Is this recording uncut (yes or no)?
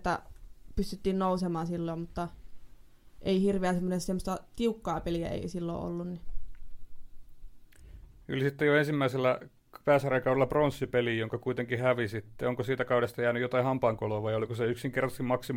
yes